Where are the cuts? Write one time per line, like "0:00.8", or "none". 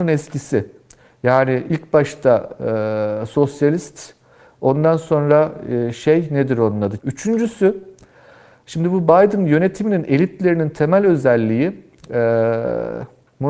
0:07.0